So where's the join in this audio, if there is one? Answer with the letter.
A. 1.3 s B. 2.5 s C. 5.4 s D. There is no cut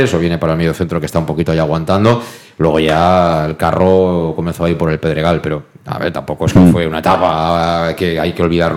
D